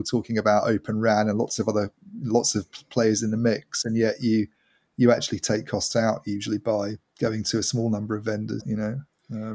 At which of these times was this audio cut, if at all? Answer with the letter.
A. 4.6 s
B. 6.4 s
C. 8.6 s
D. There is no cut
C